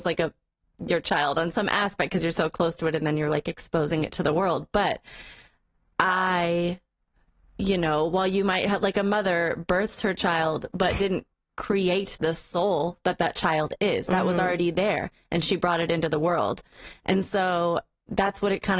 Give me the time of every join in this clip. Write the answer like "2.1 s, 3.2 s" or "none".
none